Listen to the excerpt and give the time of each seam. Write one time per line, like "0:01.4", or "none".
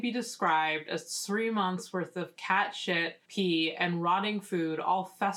0:03.3